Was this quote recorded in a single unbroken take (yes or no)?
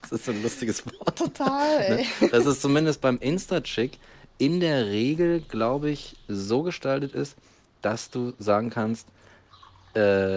yes